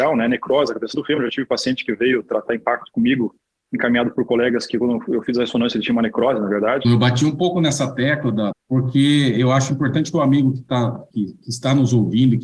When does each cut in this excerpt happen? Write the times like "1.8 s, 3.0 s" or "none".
6.8 s, 8.5 s